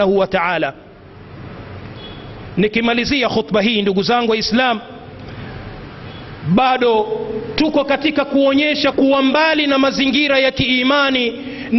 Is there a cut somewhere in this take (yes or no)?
yes